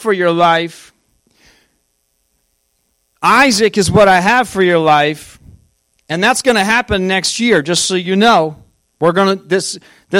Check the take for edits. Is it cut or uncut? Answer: uncut